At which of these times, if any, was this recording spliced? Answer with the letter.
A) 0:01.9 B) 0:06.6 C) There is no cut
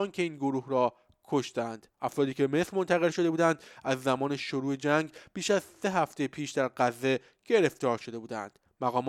A